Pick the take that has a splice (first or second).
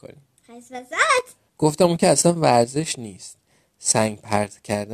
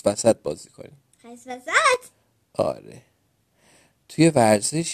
first